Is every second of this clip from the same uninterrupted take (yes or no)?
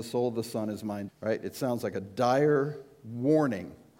no